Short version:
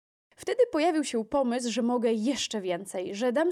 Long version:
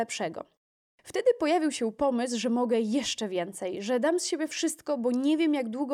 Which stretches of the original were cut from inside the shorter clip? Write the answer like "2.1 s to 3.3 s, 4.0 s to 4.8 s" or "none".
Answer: none